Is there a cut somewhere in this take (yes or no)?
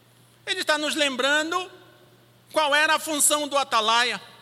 no